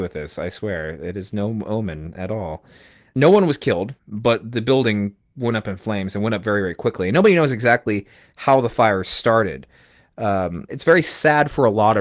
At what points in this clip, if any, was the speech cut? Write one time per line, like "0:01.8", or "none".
0:04.0
0:10.7